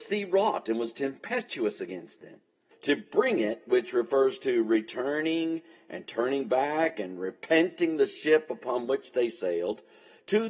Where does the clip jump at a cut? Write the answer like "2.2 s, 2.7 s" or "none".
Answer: 2.7 s